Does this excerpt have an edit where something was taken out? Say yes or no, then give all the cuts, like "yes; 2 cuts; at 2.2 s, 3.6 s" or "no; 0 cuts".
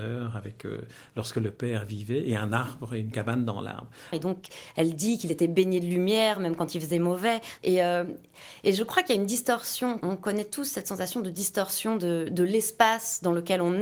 yes; 3 cuts; at 4.1 s, 7.6 s, 10.0 s